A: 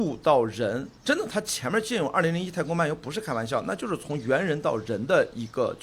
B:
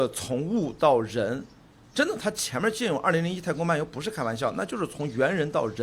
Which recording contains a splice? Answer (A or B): A